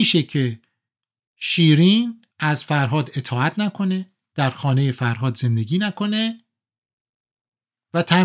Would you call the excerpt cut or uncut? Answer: cut